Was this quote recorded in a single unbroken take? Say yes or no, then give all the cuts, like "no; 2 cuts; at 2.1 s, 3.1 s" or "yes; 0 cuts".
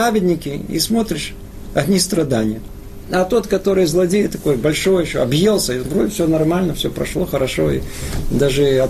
no; 1 cut; at 3.0 s